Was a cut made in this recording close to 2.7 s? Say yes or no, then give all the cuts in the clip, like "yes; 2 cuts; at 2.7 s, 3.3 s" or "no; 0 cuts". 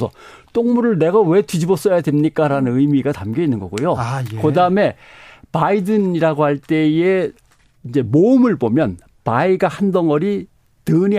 no; 0 cuts